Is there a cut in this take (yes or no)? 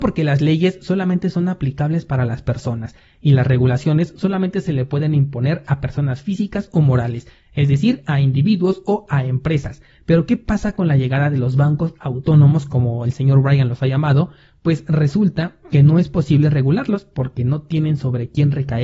no